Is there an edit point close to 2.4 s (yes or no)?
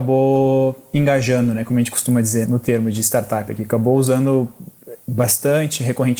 yes